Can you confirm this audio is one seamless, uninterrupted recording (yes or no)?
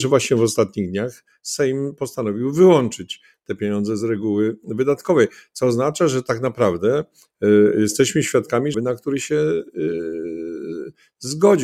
no